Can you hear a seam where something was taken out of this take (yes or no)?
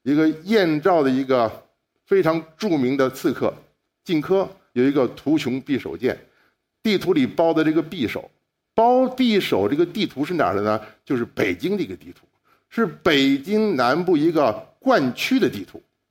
yes